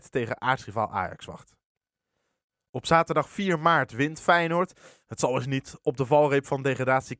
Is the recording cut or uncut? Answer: uncut